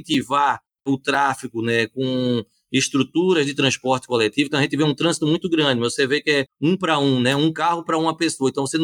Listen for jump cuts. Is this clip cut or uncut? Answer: uncut